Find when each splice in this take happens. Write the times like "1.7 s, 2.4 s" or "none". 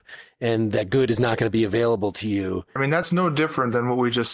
2.8 s